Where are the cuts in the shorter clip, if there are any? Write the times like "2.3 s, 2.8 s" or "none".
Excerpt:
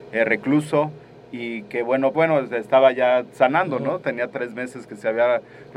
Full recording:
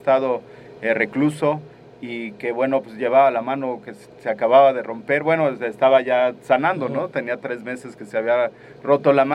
2.1 s

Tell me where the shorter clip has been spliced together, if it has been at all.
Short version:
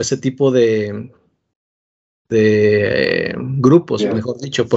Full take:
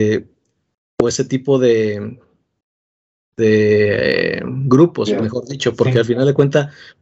none

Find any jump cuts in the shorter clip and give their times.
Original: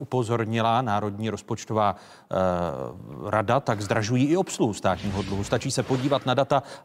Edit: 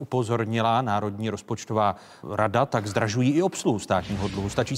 2.2 s

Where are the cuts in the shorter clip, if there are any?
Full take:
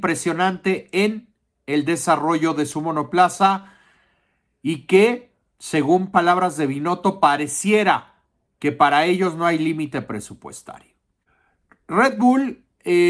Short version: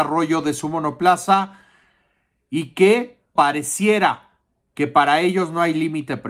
3.4 s

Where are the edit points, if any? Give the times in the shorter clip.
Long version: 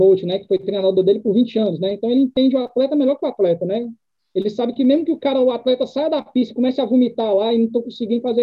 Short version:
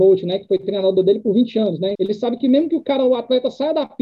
2.0 s

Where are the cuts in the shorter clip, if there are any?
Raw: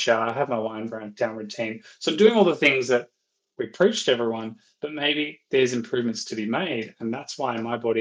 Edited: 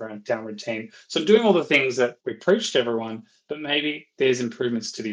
2.2 s

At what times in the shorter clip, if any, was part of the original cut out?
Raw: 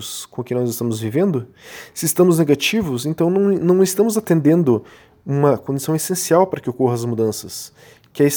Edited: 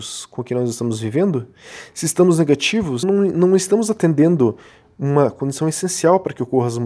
3.0 s

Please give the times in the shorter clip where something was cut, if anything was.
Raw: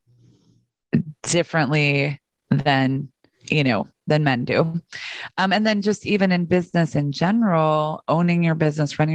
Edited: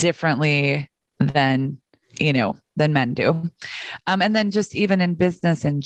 none

